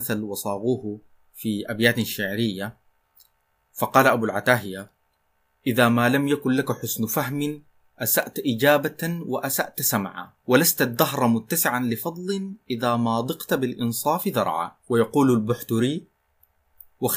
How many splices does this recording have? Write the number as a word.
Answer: two